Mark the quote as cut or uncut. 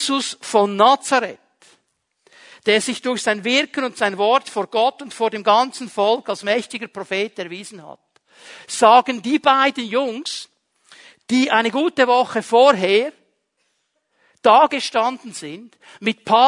uncut